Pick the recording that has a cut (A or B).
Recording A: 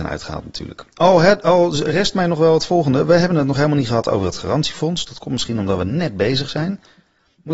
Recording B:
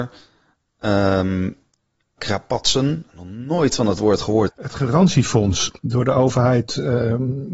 B